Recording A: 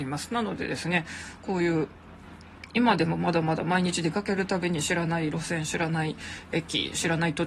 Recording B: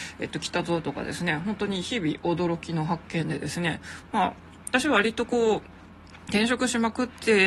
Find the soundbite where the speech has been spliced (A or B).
A